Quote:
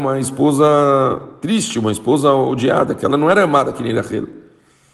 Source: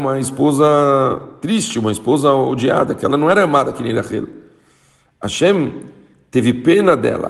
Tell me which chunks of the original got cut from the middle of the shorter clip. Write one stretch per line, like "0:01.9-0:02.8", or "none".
none